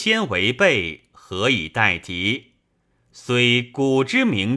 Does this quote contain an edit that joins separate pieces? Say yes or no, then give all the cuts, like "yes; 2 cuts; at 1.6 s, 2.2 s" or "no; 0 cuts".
yes; 1 cut; at 3.0 s